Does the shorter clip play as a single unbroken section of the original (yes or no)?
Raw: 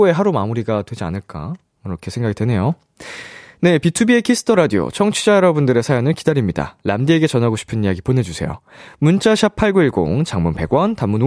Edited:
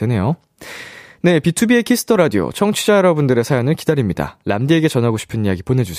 yes